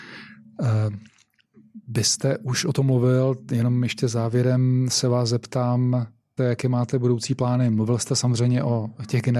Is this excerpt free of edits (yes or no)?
no